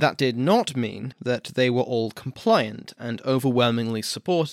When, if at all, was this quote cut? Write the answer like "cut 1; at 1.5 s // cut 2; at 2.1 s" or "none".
cut 1; at 1.1 s